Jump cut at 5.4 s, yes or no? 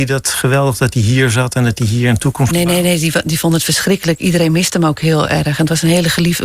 no